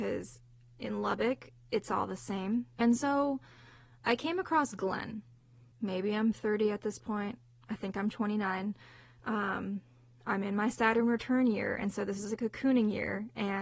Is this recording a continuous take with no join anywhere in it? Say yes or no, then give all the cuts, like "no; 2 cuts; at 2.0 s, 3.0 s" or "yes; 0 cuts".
no; 2 cuts; at 2.8 s, 5.7 s